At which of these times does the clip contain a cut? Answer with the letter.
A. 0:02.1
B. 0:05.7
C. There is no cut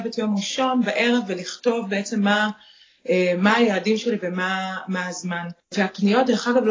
B